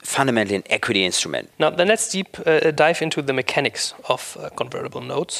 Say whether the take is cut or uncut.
cut